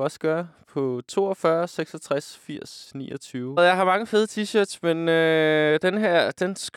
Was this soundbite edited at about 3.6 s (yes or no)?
yes